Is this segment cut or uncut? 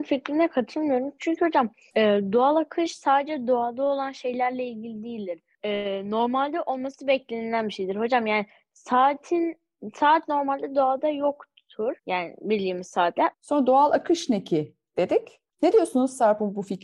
cut